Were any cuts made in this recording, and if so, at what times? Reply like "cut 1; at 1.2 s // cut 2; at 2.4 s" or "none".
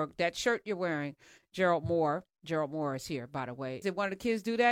cut 1; at 3.8 s